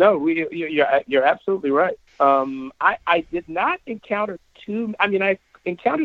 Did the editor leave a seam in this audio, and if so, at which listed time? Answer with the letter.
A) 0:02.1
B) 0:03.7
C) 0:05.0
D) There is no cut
A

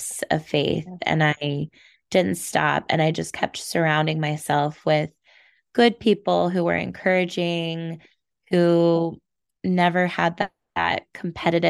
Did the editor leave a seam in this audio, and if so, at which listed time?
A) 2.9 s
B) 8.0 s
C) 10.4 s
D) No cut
D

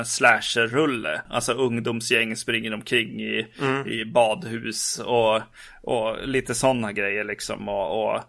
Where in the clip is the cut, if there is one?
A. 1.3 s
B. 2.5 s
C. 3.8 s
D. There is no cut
A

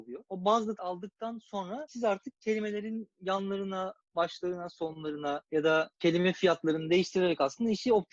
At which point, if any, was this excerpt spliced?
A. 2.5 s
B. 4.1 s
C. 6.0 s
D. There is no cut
D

